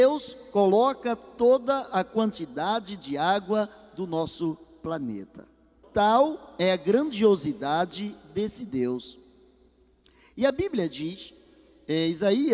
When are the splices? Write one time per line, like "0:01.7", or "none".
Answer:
0:05.8